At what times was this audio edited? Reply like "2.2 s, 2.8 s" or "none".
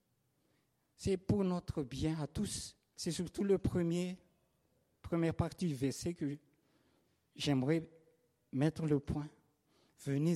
2.9 s